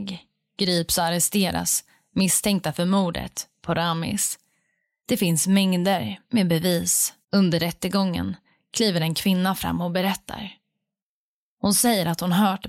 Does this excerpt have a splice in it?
yes; 2 cuts; at 7.2 s, 11.5 s

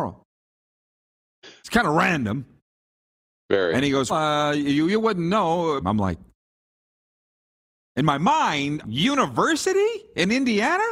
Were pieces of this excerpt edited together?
yes; 3 cuts; at 4.1 s, 5.8 s, 8.8 s

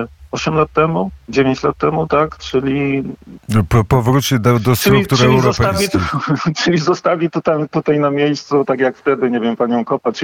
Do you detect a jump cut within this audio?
no; 0 cuts

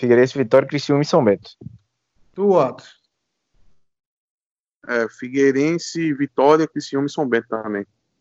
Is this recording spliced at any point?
no; 0 cuts

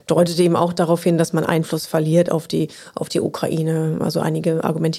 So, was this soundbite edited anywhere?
no; 0 cuts

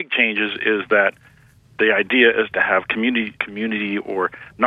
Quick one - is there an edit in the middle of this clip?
yes; 1 cut; at 3.3 s

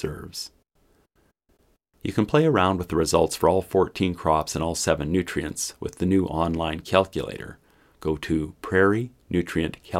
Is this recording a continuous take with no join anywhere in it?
yes; 0 cuts

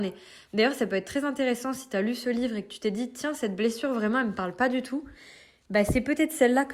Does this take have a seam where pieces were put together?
no; 0 cuts

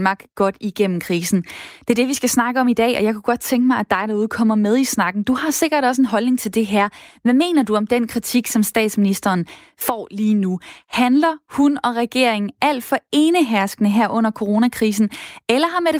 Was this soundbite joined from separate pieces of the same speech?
no; 0 cuts

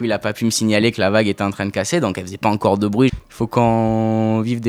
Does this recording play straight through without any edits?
no; 1 cut; at 3.1 s

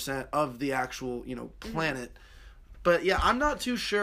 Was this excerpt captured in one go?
no; 1 cut; at 2.7 s

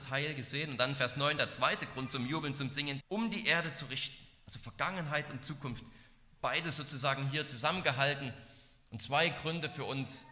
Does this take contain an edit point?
yes; 1 cut; at 3.0 s

